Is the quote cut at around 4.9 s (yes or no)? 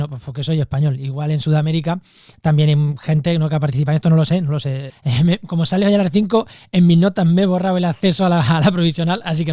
yes